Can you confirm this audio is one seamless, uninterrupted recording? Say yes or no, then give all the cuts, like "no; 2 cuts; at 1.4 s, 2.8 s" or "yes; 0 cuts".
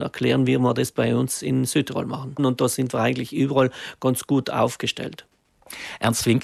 no; 1 cut; at 2.4 s